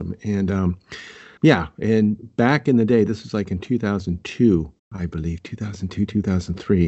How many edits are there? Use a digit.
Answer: 2